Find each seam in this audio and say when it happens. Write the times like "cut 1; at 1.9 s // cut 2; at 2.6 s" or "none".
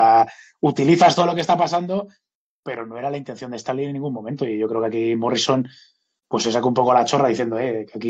none